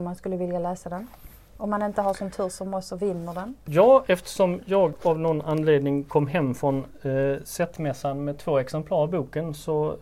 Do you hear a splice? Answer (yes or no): no